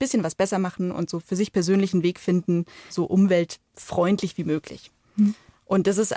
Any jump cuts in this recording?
yes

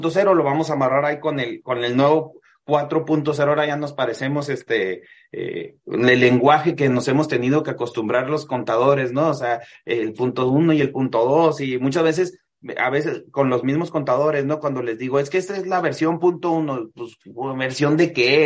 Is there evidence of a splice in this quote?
no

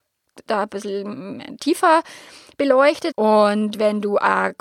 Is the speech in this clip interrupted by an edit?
yes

